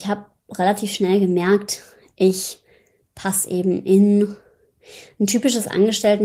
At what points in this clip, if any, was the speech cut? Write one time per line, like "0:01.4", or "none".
none

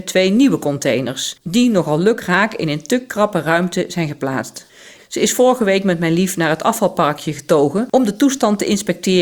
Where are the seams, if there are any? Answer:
0:05.0

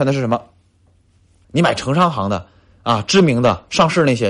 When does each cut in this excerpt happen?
0:01.4

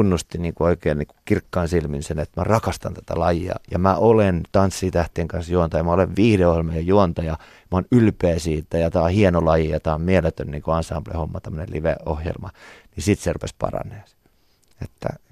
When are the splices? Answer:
none

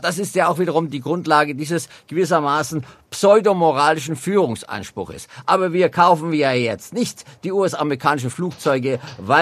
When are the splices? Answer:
none

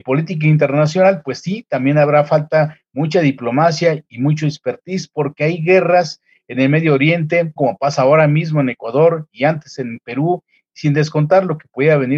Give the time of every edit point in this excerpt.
0:07.6

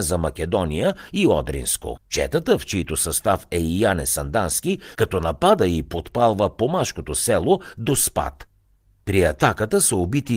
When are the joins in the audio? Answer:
0:02.0
0:04.9

